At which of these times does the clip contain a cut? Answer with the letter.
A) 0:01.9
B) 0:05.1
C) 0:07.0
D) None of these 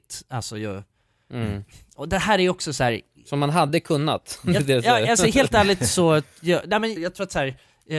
C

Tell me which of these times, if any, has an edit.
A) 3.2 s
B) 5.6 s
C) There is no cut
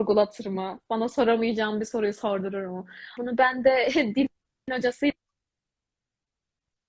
A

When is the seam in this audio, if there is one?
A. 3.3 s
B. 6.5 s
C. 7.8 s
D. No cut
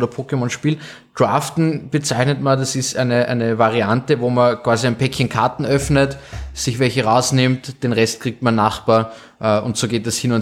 D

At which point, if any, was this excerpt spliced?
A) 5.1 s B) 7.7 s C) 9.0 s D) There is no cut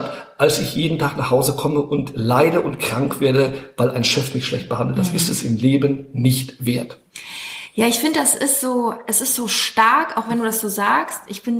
D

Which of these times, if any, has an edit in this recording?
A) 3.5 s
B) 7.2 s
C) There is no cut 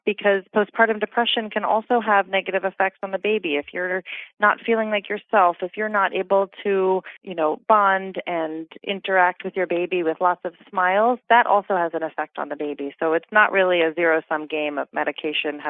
B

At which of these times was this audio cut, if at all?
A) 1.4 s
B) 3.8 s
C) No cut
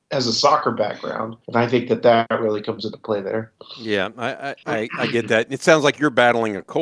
A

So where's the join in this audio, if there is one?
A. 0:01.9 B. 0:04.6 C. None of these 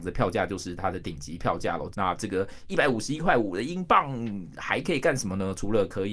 A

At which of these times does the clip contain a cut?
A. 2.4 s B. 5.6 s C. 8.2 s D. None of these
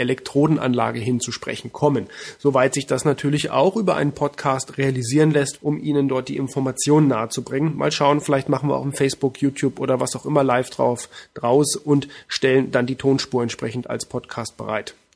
B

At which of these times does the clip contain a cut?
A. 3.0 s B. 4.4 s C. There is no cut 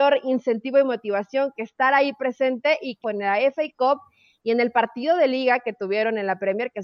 A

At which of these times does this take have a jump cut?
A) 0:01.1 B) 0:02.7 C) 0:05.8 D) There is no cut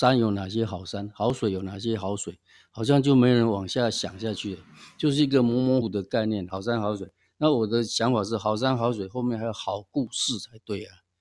C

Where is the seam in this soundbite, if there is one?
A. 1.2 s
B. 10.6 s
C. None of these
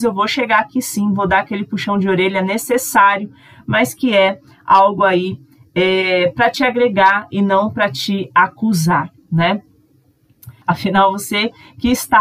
B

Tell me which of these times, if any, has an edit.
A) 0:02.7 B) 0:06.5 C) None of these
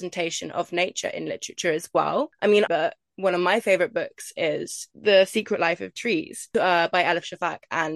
A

